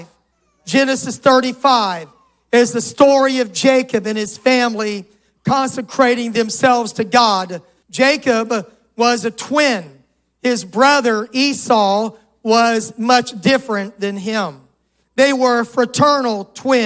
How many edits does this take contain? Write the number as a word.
one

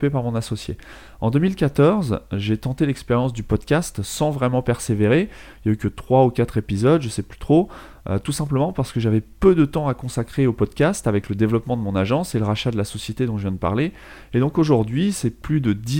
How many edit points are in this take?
zero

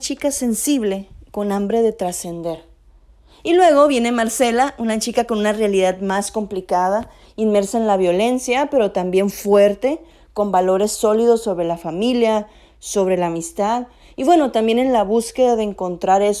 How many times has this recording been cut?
zero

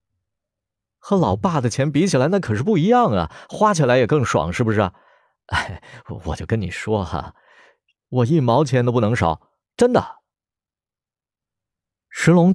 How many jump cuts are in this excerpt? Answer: three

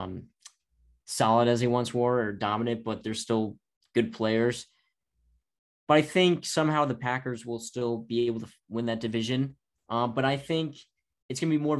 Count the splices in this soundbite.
zero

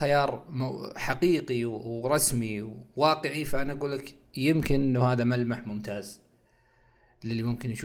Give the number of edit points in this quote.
zero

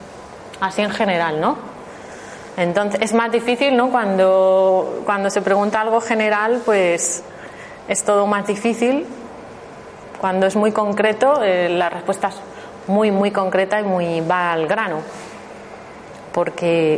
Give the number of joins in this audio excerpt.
zero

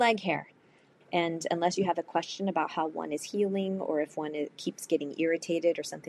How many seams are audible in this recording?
two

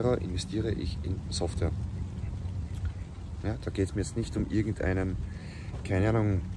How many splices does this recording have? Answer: one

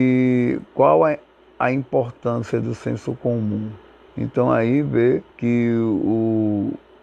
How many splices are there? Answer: two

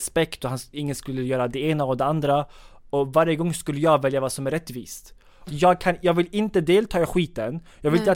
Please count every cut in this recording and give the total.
one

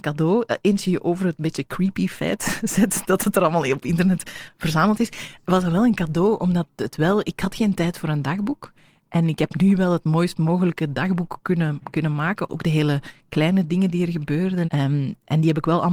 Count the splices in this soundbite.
two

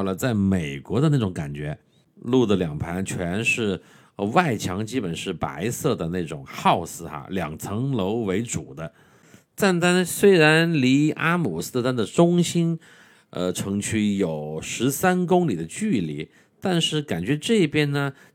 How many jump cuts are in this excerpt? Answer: zero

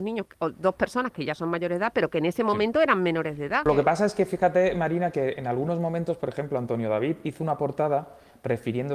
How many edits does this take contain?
one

